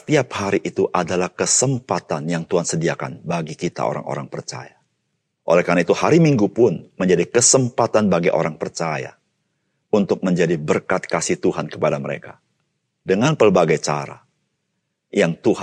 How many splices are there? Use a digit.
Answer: 1